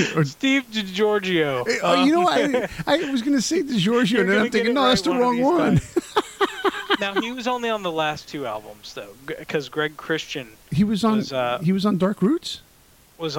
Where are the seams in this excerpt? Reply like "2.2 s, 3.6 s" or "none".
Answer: none